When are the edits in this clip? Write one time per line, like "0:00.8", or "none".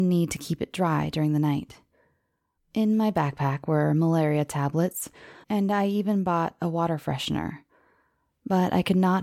0:02.6
0:05.4